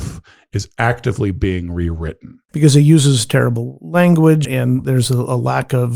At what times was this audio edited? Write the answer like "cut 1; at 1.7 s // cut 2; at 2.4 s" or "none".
cut 1; at 2.5 s // cut 2; at 4.4 s